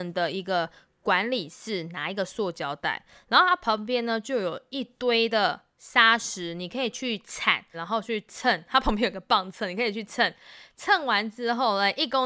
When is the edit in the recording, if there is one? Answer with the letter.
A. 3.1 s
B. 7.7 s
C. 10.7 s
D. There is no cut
B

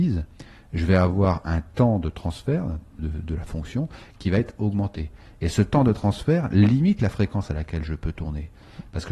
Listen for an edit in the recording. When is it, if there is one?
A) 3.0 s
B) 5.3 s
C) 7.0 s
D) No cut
A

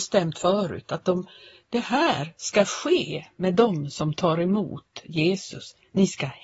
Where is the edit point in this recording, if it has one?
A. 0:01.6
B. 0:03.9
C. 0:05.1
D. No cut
D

